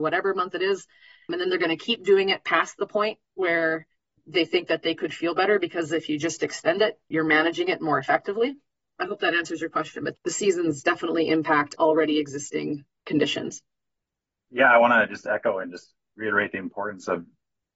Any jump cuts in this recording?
no; 0 cuts

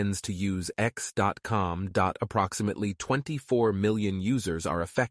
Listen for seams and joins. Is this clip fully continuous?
yes; 0 cuts

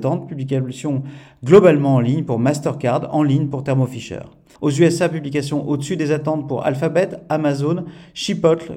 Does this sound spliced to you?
yes; 1 cut; at 4.5 s

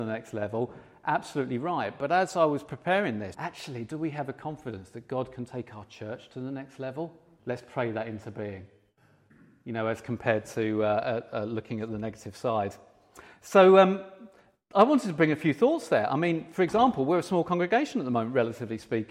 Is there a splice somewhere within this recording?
yes; 2 cuts; at 3.3 s, 7.4 s

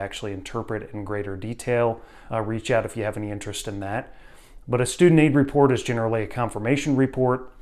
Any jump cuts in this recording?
yes; 1 cut; at 2.3 s

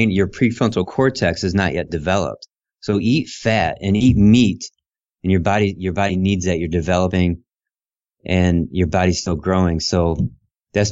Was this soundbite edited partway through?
no; 0 cuts

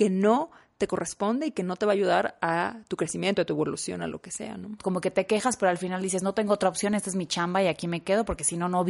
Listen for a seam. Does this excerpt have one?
yes; 1 cut; at 4.8 s

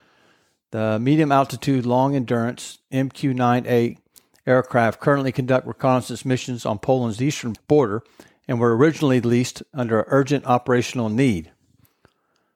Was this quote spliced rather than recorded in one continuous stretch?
yes; 1 cut; at 7.5 s

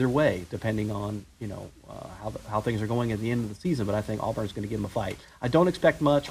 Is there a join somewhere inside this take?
no; 0 cuts

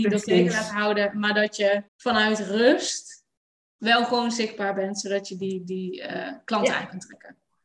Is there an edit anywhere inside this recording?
yes; 1 cut; at 1.9 s

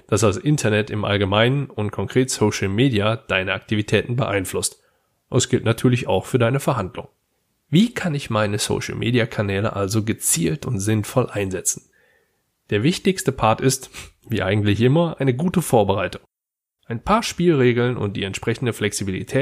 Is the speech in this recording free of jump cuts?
yes; 0 cuts

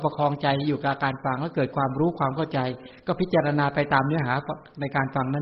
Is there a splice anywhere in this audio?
no; 0 cuts

